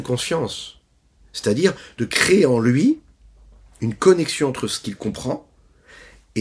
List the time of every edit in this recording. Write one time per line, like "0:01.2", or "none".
none